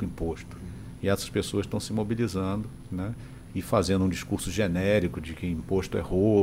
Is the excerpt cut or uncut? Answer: uncut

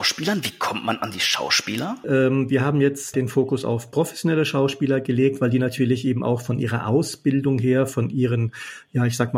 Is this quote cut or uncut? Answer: cut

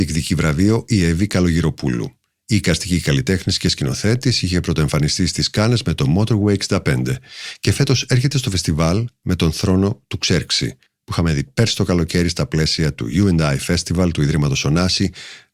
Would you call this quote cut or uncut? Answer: cut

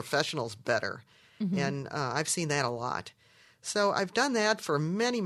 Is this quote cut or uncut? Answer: uncut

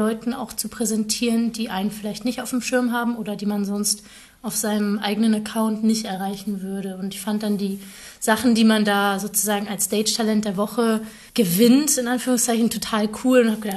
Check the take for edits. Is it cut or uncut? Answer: cut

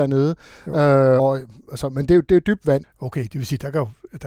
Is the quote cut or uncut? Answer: cut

